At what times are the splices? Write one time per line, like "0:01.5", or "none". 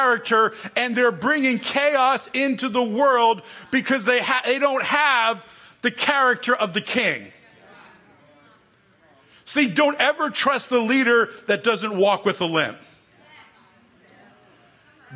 none